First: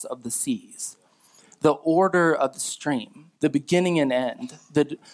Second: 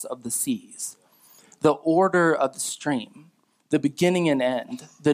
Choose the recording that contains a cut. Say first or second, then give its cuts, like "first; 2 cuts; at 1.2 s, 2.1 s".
first; 1 cut; at 3.4 s